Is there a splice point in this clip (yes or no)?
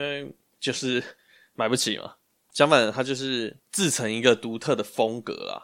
yes